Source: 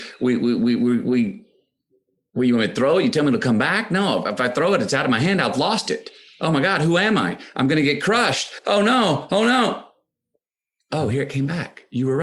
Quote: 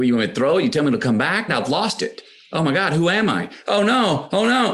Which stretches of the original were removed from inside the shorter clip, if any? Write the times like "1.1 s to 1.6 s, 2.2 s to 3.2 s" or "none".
3.9 s to 5.4 s, 7.5 s to 8.6 s